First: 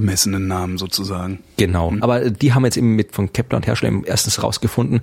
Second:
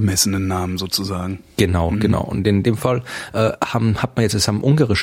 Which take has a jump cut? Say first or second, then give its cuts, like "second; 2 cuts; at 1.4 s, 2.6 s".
first; 2 cuts; at 2.0 s, 3.1 s